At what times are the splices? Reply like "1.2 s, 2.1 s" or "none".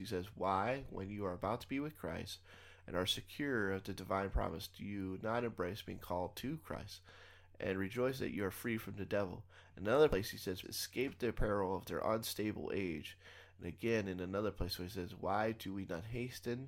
10.6 s